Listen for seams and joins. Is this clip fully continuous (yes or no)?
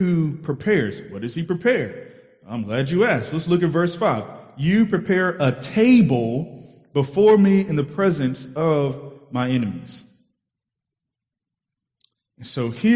yes